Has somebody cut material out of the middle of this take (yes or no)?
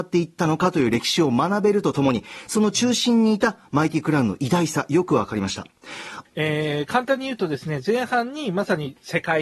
yes